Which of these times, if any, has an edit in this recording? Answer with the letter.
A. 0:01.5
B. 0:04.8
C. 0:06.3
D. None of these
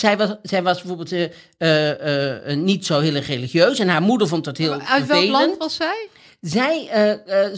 D